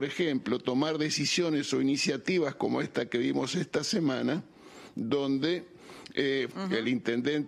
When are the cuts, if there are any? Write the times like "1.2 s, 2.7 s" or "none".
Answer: 6.5 s